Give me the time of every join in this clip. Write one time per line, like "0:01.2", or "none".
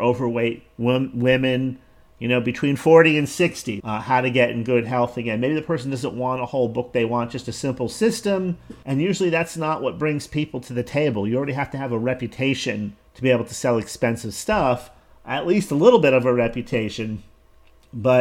0:03.8
0:08.8
0:13.1